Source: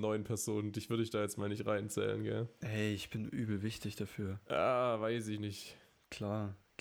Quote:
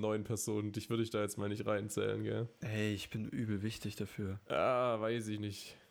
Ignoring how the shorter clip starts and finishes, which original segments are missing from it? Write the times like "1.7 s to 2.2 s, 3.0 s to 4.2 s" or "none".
none